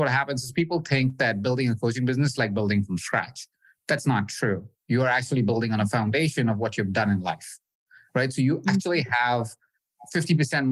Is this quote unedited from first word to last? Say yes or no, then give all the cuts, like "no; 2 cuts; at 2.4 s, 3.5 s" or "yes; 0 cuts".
yes; 0 cuts